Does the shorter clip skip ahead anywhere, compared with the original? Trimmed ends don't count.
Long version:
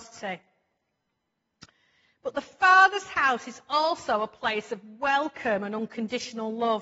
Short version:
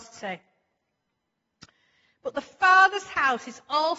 no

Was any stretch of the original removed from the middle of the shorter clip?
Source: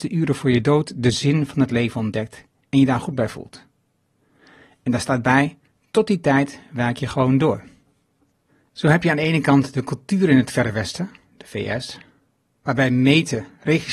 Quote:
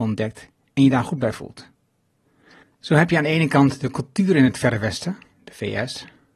yes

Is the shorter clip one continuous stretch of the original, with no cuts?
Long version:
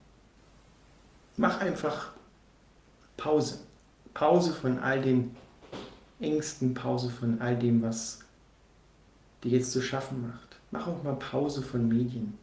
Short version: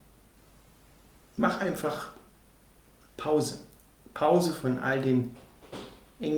yes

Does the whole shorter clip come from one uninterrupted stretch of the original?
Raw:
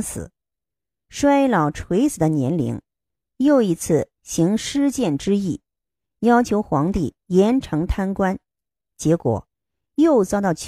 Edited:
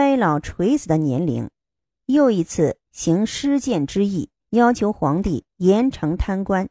no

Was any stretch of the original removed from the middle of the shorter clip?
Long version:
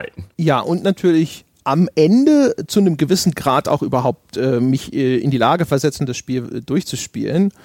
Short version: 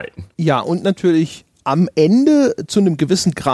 no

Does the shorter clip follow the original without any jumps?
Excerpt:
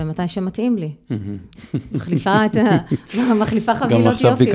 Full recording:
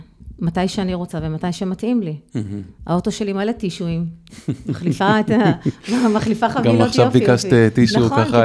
no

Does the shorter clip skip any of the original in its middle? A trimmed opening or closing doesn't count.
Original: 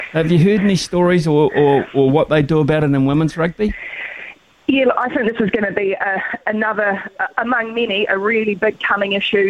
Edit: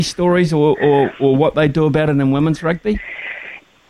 no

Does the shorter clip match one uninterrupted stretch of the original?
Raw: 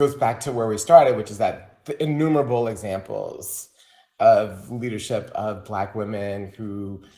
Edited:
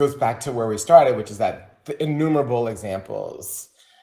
yes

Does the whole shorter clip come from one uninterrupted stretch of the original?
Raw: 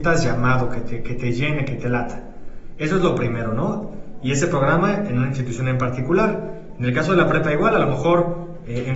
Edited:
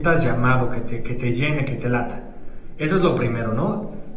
yes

